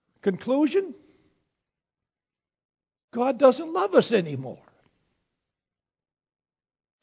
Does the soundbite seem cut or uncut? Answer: uncut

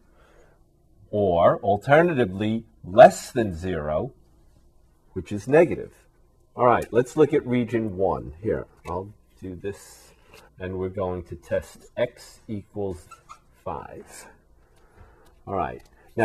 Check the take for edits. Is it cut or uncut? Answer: cut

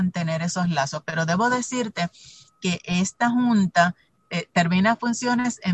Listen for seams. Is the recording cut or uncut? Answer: uncut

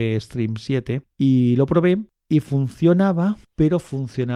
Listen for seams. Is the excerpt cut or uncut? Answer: cut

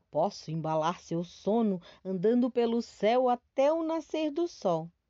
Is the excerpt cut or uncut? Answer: uncut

